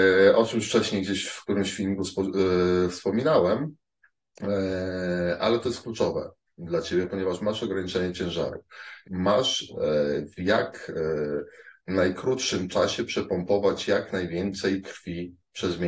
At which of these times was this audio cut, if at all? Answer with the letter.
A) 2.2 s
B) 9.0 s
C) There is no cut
B